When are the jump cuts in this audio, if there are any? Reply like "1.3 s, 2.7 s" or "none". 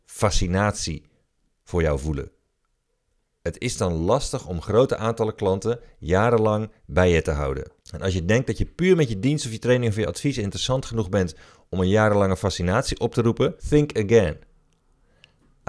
7.8 s, 13.6 s